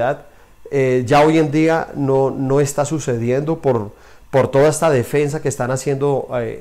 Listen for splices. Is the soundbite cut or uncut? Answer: uncut